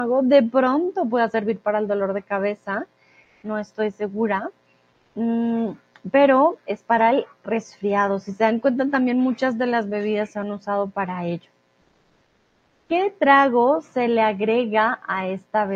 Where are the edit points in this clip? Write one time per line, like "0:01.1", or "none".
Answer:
none